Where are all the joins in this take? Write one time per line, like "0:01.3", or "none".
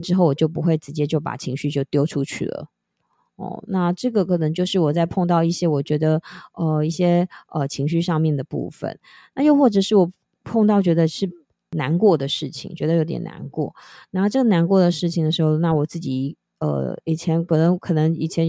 none